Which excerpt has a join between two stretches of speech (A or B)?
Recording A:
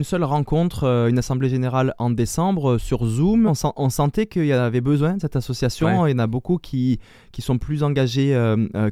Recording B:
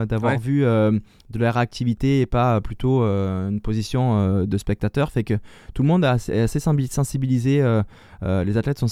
A